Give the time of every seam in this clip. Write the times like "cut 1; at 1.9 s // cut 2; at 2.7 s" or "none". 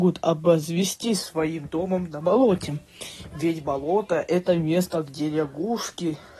none